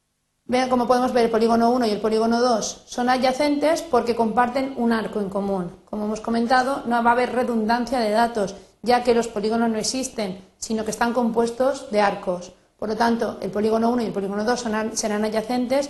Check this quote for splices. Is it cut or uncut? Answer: uncut